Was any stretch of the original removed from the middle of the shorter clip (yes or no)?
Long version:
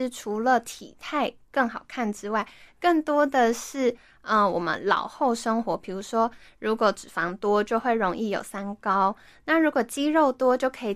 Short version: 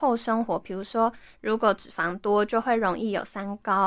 no